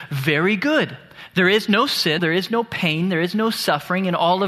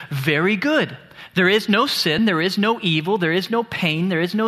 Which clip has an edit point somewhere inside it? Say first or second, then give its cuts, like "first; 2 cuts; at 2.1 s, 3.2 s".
first; 1 cut; at 2.2 s